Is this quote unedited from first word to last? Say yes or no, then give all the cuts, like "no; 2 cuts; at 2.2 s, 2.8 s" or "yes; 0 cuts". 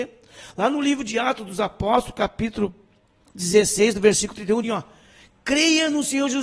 no; 1 cut; at 4.6 s